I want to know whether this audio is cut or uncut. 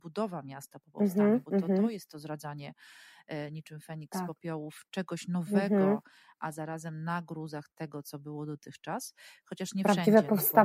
uncut